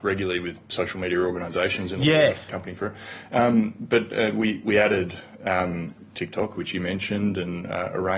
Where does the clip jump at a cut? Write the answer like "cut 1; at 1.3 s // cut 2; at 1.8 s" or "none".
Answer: cut 1; at 2.5 s